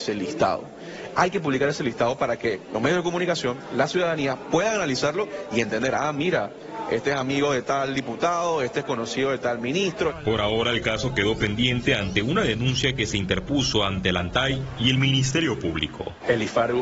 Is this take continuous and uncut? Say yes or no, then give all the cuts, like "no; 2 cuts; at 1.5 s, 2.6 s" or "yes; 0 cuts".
yes; 0 cuts